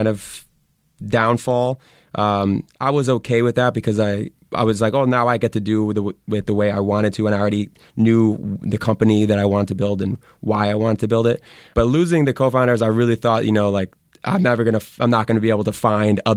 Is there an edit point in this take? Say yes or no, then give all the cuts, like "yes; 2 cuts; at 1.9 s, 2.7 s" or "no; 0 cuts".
no; 0 cuts